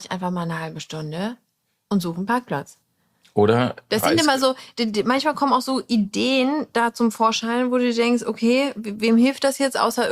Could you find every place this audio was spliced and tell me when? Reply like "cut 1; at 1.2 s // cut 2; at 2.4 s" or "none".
none